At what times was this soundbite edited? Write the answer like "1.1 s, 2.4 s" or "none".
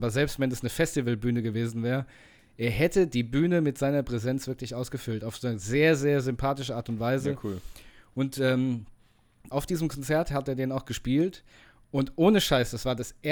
9.5 s